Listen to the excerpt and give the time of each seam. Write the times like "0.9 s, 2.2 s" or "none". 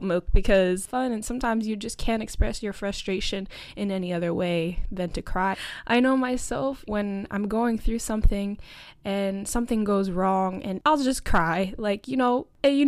5.5 s, 6.9 s